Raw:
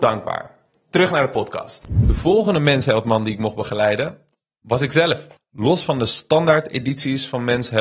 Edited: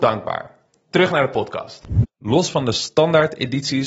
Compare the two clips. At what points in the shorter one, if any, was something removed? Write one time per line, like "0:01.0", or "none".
0:02.0